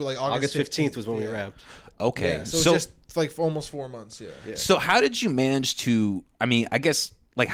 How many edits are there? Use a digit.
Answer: 0